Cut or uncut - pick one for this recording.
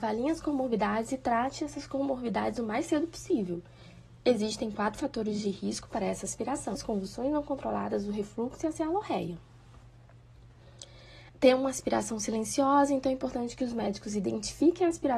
cut